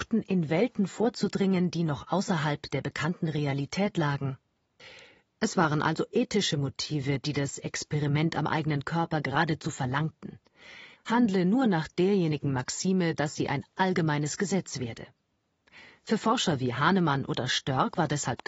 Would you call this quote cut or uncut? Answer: cut